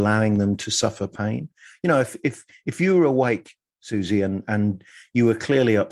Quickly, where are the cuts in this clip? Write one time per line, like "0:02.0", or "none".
none